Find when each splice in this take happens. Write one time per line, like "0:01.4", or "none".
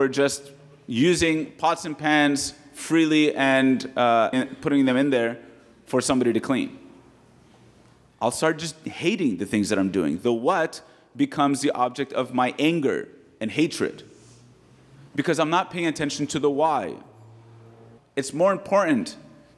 0:04.3
0:18.0